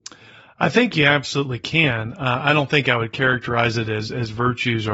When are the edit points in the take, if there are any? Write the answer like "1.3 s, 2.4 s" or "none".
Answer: none